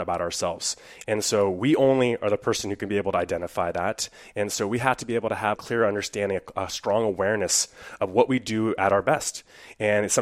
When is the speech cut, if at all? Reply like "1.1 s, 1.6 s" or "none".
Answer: 1.0 s, 5.6 s